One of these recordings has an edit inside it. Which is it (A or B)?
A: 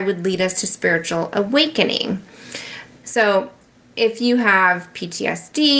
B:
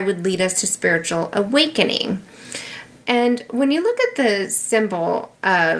A